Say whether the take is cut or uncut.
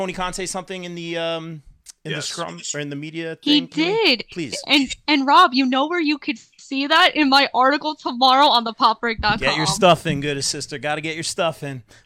uncut